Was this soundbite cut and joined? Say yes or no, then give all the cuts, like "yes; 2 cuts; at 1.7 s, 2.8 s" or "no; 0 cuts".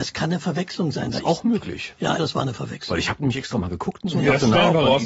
yes; 1 cut; at 2.2 s